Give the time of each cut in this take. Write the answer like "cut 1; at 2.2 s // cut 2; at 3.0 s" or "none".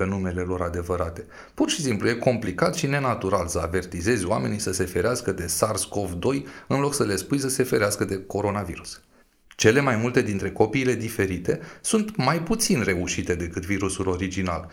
cut 1; at 9.4 s

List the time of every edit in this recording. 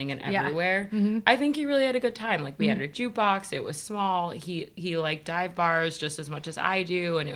none

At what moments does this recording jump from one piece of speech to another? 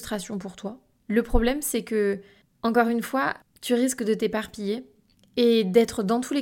cut 1; at 1.0 s

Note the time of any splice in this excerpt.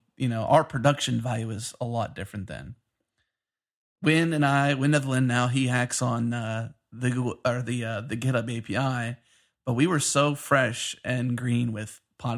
none

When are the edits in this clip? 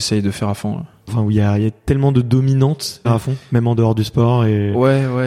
cut 1; at 1.1 s // cut 2; at 3.0 s

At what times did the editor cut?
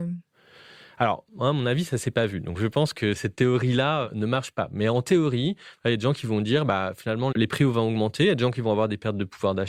cut 1; at 7.3 s

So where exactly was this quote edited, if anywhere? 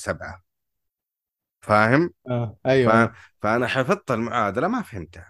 none

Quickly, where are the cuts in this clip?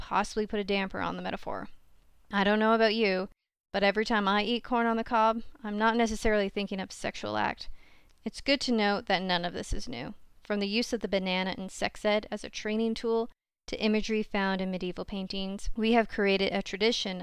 cut 1; at 8.1 s

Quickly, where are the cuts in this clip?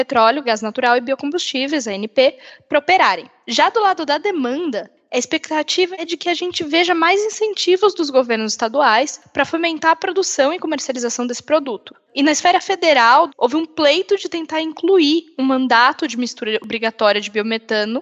cut 1; at 12.1 s // cut 2; at 13.3 s

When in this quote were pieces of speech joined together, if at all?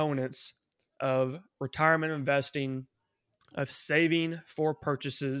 none

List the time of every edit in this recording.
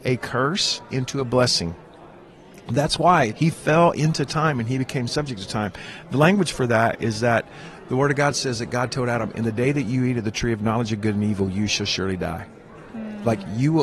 cut 1; at 3.3 s // cut 2; at 9.3 s

